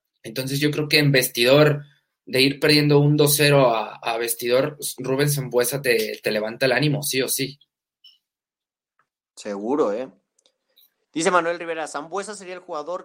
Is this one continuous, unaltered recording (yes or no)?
yes